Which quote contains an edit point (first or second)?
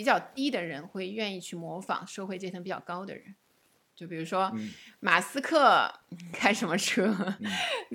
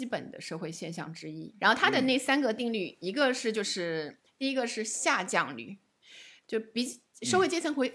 second